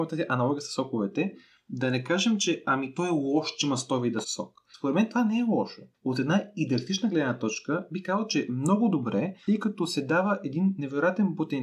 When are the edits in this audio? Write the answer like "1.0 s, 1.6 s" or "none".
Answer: 4.2 s